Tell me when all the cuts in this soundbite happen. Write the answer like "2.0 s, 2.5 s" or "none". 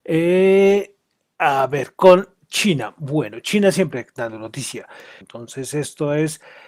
5.2 s